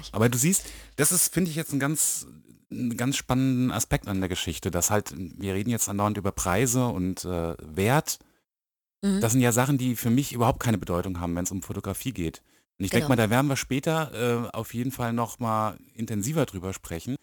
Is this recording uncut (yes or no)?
yes